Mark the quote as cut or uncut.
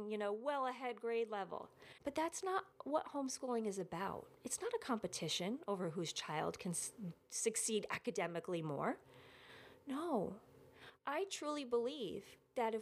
cut